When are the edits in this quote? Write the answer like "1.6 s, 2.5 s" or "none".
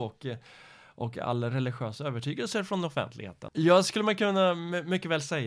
3.5 s